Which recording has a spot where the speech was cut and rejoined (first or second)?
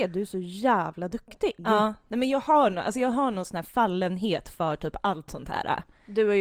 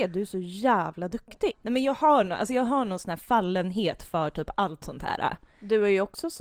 second